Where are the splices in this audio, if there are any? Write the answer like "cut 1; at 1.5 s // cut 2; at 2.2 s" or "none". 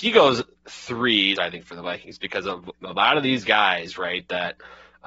cut 1; at 1.3 s